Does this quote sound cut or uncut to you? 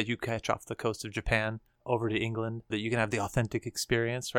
cut